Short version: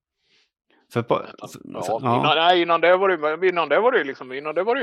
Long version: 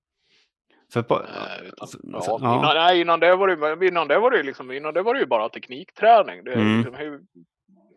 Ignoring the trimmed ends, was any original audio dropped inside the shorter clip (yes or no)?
yes